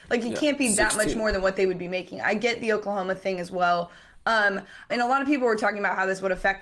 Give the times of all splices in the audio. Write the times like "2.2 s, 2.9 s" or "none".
4.9 s